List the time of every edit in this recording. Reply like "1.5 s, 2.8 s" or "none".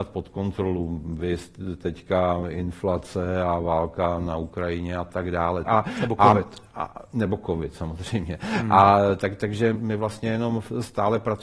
5.7 s, 9.7 s